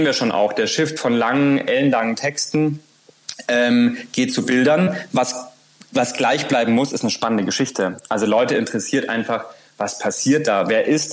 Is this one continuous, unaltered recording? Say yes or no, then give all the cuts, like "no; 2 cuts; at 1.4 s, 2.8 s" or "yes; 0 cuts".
yes; 0 cuts